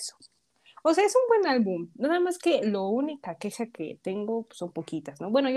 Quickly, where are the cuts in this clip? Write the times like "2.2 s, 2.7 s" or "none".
none